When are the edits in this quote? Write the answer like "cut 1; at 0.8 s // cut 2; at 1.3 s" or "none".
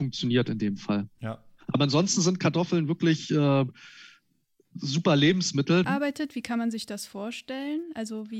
cut 1; at 5.8 s